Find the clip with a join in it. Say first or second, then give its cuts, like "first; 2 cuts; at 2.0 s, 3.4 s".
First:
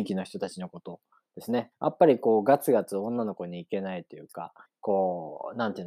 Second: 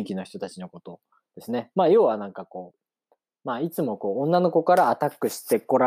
first; 2 cuts; at 1.7 s, 4.7 s